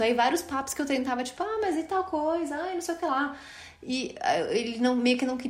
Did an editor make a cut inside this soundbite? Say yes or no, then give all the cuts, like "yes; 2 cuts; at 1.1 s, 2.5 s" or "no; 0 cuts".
no; 0 cuts